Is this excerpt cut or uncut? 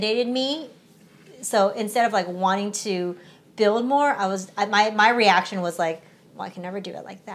uncut